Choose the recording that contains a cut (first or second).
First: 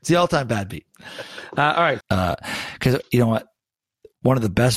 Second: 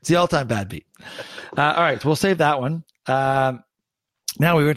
first